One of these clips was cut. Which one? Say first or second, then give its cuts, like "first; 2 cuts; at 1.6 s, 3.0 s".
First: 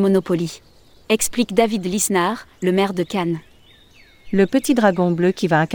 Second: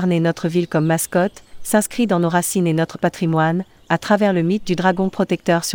first; 1 cut; at 1.0 s